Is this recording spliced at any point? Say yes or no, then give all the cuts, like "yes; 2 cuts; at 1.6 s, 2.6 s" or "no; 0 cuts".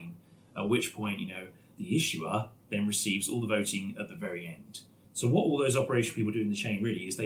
yes; 1 cut; at 5.0 s